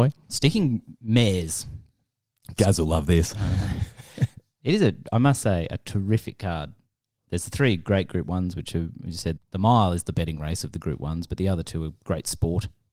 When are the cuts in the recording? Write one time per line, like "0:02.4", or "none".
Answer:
0:09.4